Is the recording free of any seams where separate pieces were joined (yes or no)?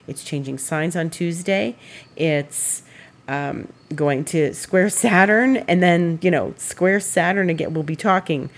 yes